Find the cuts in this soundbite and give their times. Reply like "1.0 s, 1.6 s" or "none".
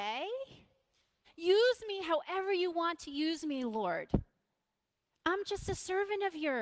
1.2 s